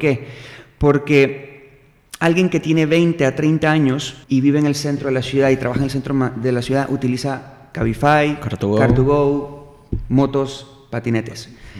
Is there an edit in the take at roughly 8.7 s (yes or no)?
no